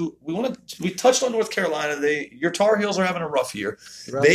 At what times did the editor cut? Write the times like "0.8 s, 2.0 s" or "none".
none